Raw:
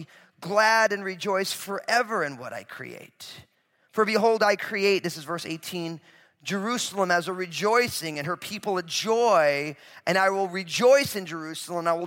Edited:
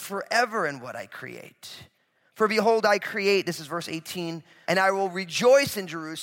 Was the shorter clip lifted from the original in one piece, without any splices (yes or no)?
no